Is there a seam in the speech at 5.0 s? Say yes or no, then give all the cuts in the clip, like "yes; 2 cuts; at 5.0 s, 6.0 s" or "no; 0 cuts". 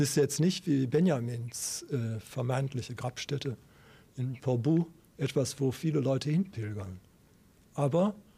no; 0 cuts